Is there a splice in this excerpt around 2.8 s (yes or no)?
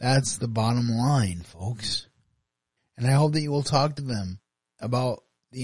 yes